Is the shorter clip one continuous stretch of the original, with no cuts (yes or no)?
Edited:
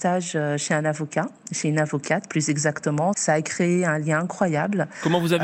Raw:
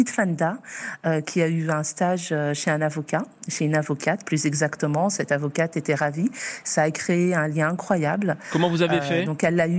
no